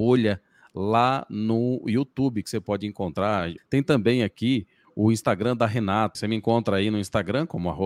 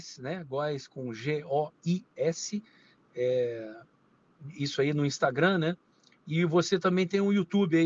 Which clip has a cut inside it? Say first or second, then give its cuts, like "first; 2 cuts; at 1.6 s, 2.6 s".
first; 2 cuts; at 3.6 s, 6.1 s